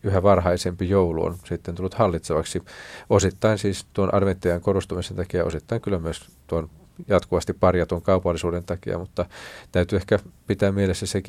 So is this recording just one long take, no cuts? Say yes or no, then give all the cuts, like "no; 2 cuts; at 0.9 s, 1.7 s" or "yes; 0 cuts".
yes; 0 cuts